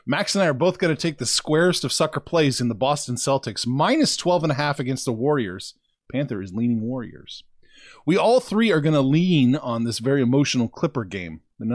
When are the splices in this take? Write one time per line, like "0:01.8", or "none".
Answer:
none